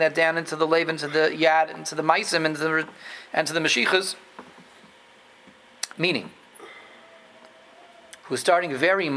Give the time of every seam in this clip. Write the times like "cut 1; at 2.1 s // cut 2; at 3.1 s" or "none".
cut 1; at 5.9 s // cut 2; at 8.2 s